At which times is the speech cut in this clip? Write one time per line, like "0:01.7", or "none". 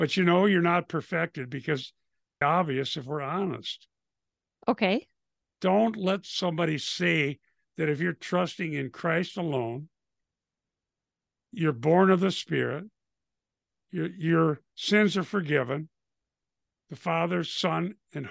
0:02.4
0:05.4
0:16.7